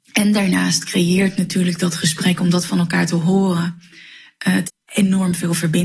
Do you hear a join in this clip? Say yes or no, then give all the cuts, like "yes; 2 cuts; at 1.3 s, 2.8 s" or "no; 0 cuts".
yes; 1 cut; at 4.6 s